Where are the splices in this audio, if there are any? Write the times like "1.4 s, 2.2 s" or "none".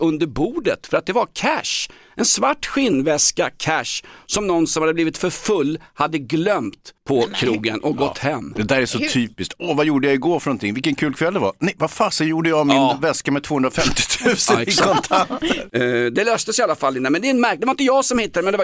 7.0 s

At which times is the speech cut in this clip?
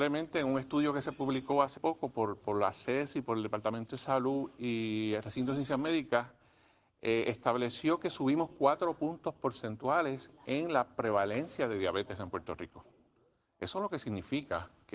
1.8 s

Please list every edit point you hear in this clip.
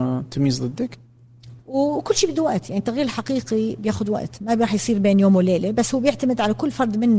1.6 s

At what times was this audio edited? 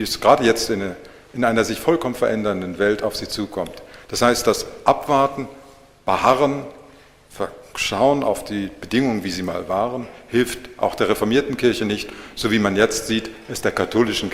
none

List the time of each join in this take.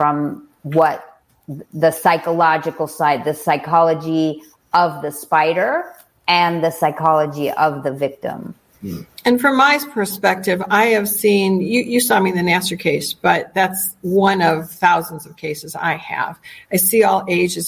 none

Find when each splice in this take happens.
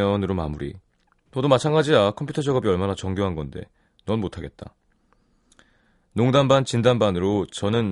1.3 s

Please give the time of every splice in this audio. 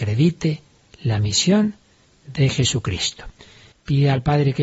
3.7 s

